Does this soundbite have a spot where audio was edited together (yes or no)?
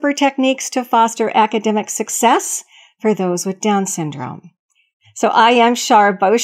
no